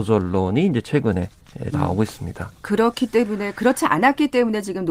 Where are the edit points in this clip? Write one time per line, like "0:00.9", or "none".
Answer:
0:01.7